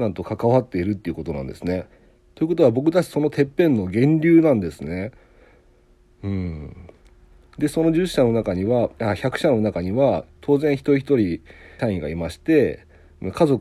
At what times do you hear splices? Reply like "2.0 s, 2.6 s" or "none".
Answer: 11.8 s